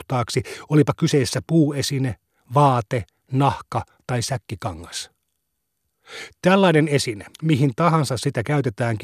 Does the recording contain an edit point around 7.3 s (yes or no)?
yes